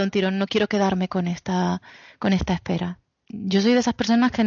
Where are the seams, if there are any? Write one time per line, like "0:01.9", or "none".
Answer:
0:03.2